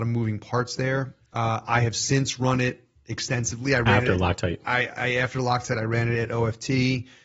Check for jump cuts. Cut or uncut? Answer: uncut